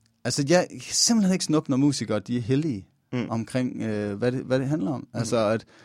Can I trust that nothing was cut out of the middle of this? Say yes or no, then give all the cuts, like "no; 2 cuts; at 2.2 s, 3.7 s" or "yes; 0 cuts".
yes; 0 cuts